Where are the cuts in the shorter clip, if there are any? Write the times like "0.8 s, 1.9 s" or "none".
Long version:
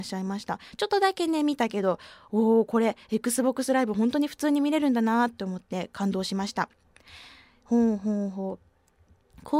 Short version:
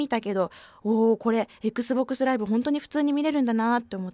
none

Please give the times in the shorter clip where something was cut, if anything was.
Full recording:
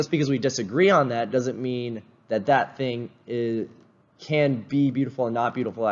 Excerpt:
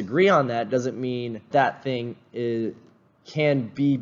1.5 s

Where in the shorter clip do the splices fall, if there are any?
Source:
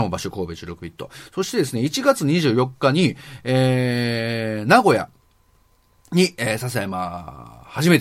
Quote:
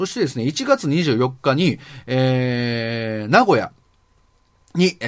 none

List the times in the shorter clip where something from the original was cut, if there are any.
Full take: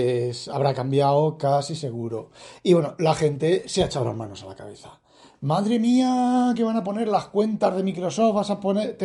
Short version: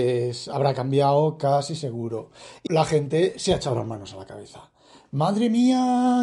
2.7 s

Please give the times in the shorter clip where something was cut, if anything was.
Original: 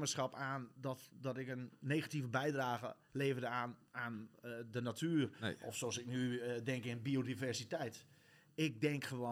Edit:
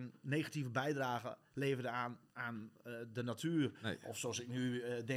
none

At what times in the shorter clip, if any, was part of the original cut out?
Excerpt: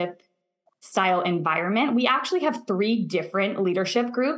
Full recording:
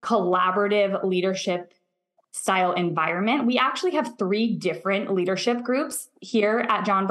none

